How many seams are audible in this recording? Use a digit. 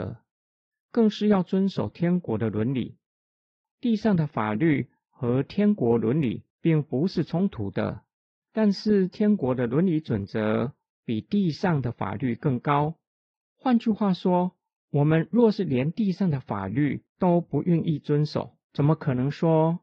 1